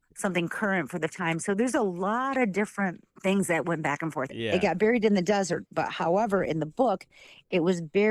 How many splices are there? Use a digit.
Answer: 2